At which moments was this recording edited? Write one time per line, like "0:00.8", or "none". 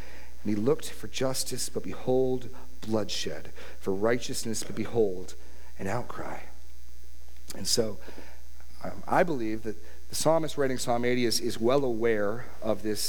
none